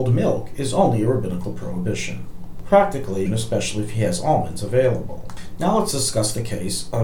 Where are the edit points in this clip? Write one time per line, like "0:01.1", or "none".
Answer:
0:03.3